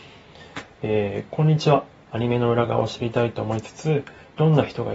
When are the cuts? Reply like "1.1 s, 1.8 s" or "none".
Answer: 1.9 s